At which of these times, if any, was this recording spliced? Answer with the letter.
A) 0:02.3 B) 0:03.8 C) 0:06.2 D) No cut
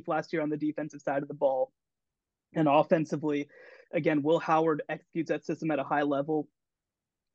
D